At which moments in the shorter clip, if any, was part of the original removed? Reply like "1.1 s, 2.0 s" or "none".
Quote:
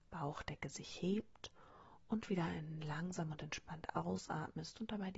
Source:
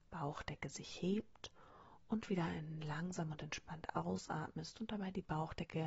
none